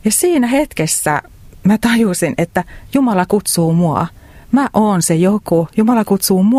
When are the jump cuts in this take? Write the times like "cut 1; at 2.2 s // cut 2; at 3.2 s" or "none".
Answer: none